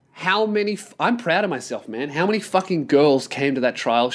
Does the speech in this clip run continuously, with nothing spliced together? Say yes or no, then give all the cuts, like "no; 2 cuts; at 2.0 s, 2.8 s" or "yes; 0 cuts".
yes; 0 cuts